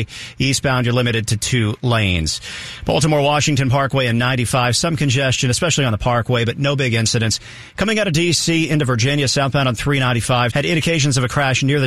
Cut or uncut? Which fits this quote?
cut